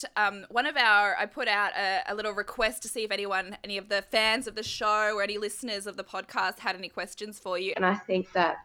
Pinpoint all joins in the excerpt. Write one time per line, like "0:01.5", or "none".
0:07.7